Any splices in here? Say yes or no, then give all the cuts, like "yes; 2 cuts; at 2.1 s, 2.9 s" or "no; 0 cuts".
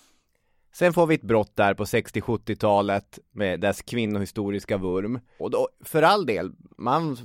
yes; 1 cut; at 5.4 s